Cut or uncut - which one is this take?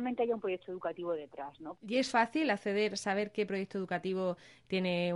cut